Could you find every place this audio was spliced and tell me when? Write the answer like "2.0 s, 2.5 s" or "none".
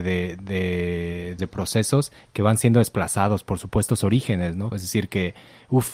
1.4 s, 4.7 s